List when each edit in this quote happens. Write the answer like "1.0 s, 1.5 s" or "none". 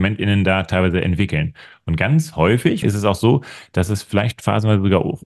2.8 s

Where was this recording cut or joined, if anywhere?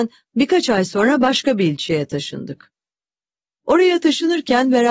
none

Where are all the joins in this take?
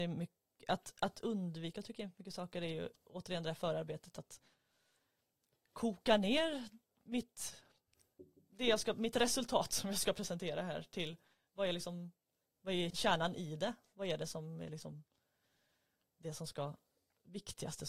12.9 s

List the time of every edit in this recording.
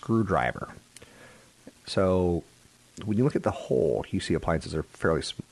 1.7 s

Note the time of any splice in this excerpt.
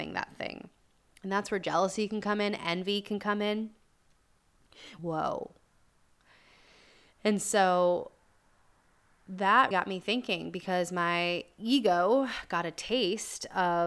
5.0 s, 9.7 s

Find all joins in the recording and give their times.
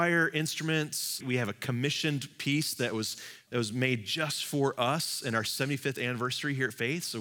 1.2 s, 3.5 s

